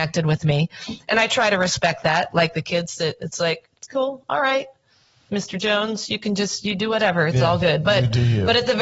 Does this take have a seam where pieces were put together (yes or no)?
no